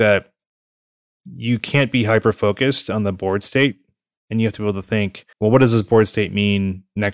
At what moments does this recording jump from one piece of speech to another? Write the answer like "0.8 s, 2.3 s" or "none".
5.3 s